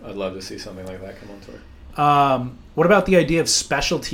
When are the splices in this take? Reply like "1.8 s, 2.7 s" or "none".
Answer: 1.9 s